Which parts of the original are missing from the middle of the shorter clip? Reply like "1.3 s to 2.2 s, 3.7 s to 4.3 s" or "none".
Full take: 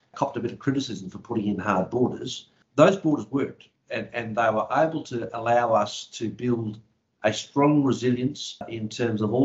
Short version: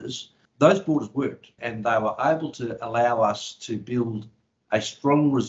3.7 s to 4.1 s